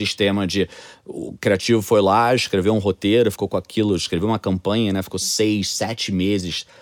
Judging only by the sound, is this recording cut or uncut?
uncut